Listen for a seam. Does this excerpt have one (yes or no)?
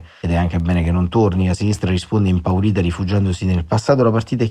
no